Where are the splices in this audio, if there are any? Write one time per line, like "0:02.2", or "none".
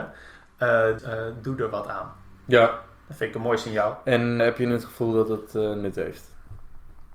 0:01.0
0:04.4